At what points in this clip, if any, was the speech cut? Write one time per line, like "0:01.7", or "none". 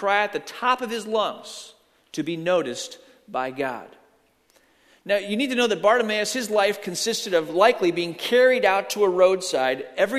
none